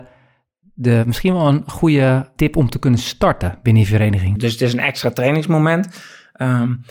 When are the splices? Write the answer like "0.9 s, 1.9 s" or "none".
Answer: 2.4 s, 4.4 s

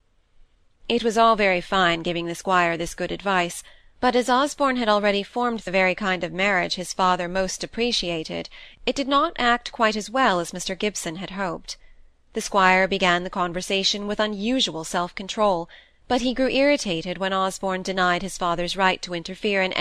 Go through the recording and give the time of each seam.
none

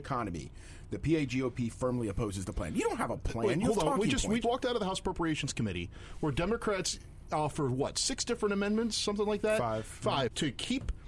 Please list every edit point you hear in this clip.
4.4 s

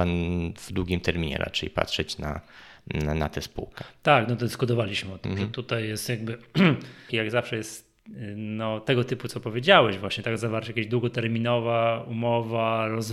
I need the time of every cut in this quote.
7.1 s

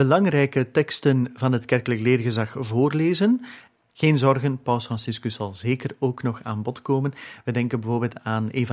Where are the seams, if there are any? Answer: 3.9 s

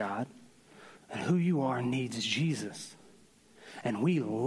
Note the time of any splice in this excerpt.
1.0 s

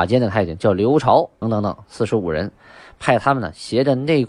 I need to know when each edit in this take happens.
1.4 s

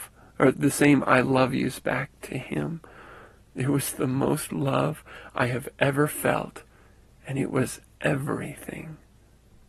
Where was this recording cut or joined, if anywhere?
none

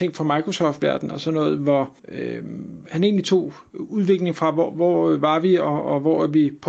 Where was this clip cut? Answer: 2.0 s

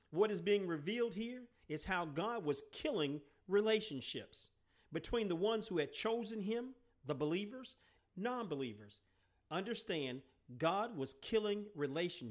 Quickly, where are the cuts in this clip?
8.0 s

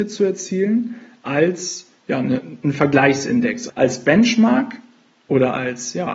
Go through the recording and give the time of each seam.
3.7 s

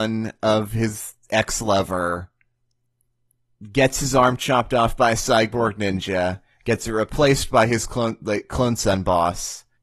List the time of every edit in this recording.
none

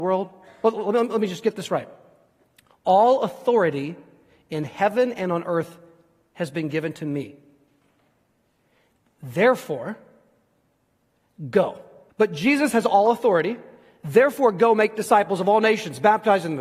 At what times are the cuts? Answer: 12.1 s

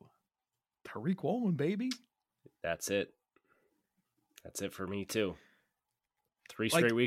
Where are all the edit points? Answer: none

